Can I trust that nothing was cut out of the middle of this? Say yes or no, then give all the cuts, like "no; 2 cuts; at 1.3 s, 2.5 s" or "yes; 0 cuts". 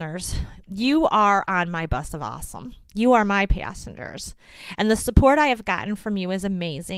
yes; 0 cuts